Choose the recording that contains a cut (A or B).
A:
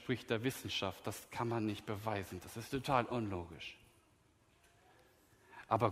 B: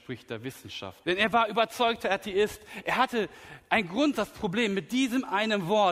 B